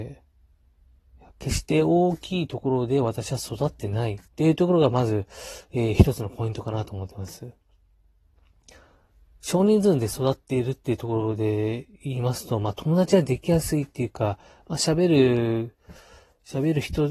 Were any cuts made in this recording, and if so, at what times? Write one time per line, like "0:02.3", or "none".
0:01.3
0:04.3